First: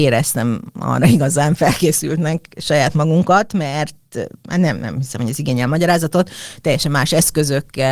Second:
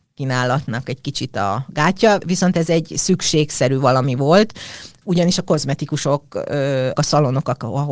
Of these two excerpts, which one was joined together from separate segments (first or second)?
second